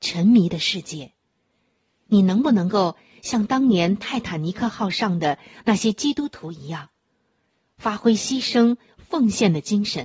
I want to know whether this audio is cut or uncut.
uncut